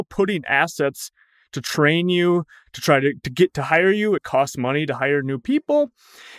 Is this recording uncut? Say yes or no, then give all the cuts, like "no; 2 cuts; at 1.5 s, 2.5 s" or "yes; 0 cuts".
yes; 0 cuts